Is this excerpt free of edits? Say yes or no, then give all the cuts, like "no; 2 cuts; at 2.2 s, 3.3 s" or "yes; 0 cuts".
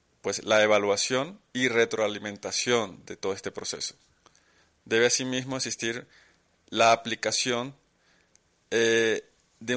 yes; 0 cuts